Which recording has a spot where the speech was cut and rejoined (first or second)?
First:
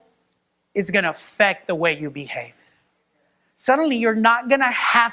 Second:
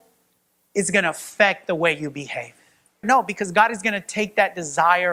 second